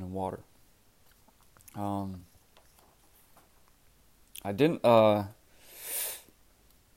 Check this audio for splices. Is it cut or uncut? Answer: uncut